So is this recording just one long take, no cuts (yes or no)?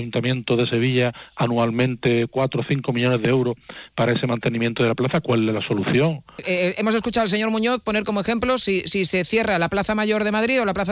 no